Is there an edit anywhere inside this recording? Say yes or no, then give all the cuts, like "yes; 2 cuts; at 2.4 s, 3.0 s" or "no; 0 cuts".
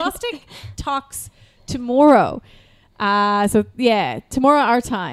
no; 0 cuts